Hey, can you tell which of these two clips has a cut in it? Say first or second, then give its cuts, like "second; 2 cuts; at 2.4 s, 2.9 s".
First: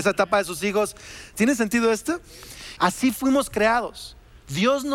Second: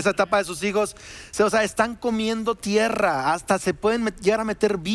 first; 2 cuts; at 1.3 s, 2.8 s